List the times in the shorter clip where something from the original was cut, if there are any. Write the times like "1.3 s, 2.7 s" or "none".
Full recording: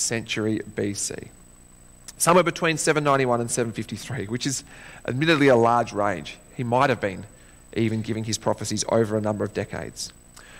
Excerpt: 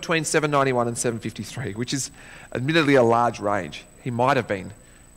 none